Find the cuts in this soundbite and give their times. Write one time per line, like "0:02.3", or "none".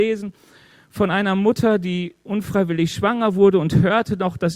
none